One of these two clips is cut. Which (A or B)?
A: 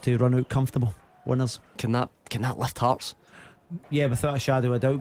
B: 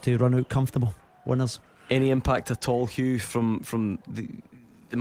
A